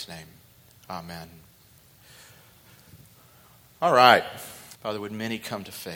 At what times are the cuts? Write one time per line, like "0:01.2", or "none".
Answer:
0:04.7